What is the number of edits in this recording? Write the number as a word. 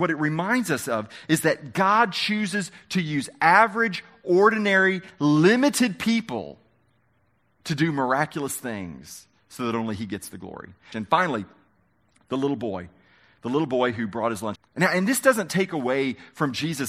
two